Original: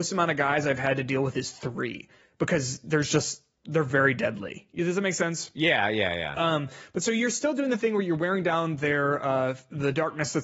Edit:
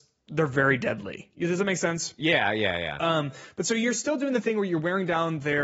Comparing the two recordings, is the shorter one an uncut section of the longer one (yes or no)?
yes